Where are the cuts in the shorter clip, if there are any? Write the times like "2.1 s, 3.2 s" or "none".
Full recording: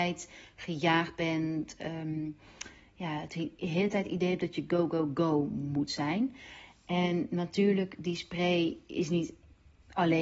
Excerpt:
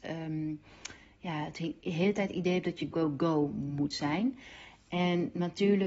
2.9 s